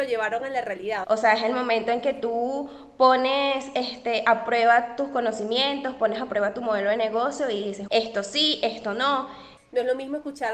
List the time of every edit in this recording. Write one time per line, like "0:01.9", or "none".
0:01.0
0:07.9
0:09.6